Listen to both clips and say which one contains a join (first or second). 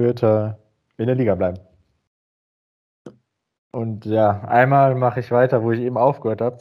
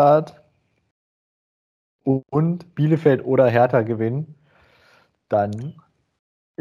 first